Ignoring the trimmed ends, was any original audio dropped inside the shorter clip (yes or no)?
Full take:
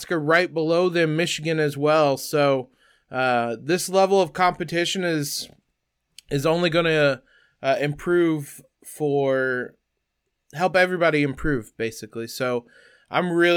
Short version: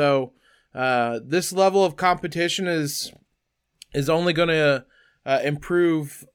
no